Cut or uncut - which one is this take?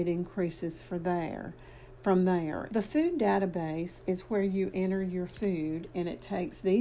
cut